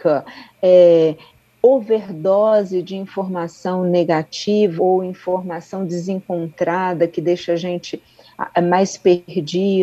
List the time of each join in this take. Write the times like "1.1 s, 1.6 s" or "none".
4.8 s